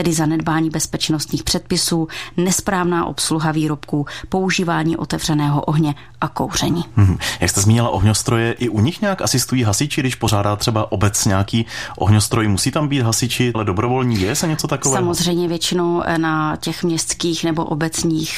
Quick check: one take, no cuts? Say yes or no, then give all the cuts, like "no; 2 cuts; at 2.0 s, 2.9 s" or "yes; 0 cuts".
no; 1 cut; at 13.5 s